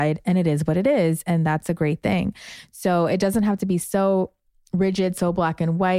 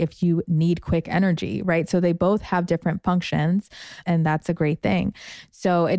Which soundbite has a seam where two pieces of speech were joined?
second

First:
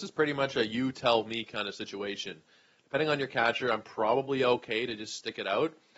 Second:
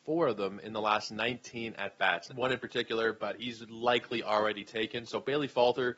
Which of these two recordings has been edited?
second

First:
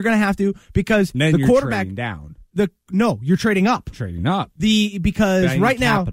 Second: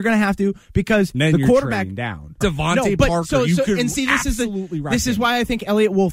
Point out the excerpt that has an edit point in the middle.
second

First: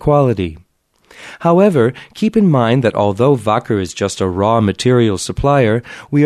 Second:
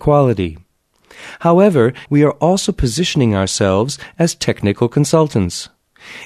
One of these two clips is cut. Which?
second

